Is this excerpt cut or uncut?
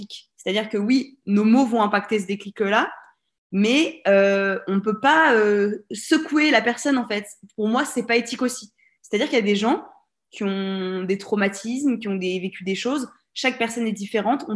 uncut